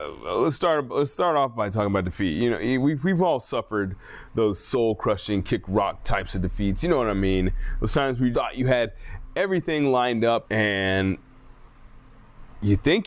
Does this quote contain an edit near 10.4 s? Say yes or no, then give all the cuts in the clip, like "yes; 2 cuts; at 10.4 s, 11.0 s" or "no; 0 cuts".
yes; 2 cuts; at 8.3 s, 10.4 s